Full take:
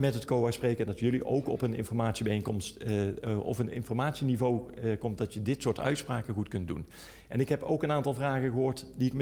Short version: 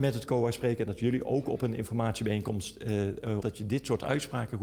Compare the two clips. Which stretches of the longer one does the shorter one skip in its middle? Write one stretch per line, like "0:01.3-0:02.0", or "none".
0:03.4-0:05.2